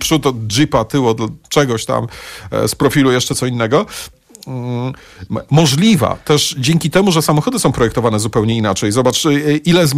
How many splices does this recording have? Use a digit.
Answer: 1